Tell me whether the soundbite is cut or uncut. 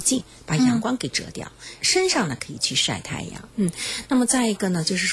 cut